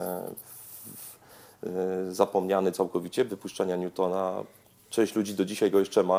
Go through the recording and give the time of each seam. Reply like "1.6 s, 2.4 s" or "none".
3.3 s